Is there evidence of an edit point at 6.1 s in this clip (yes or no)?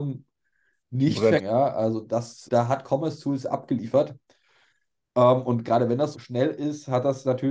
yes